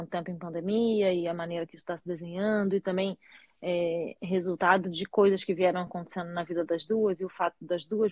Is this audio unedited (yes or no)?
yes